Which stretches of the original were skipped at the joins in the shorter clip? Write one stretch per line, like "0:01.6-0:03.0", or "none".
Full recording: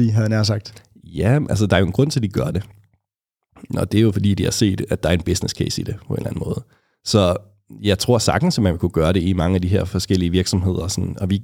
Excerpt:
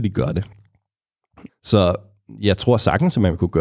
0:03.7-0:06.9